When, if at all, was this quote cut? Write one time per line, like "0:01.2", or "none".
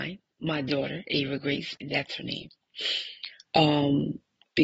0:01.7
0:03.4